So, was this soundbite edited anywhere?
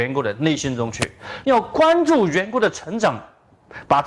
yes; 1 cut; at 1.4 s

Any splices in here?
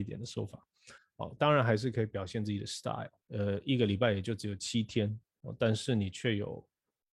yes; 2 cuts; at 1.0 s, 3.2 s

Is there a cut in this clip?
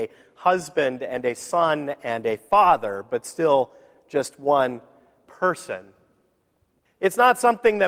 yes; 1 cut; at 6.9 s

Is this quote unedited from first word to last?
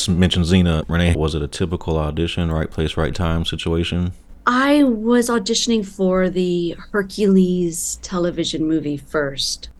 no; 1 cut; at 1.1 s

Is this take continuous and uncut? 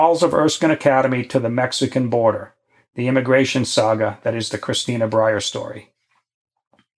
yes; 0 cuts

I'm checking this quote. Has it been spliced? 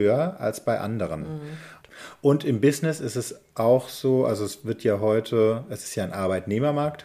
yes; 1 cut; at 1.8 s

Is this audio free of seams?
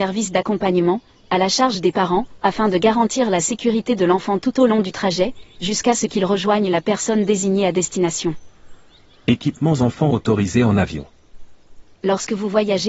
yes; 0 cuts

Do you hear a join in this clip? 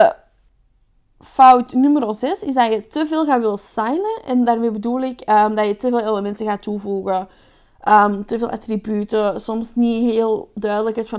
no; 0 cuts

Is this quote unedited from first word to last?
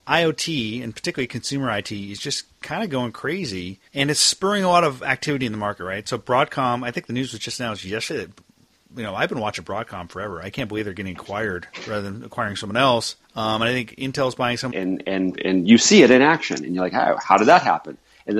no; 3 cuts; at 3.9 s, 13.2 s, 14.7 s

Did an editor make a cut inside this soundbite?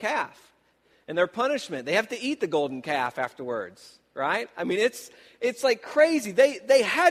no; 0 cuts

